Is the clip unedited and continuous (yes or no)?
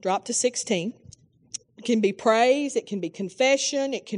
no